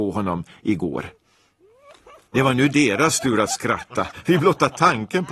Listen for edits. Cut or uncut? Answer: uncut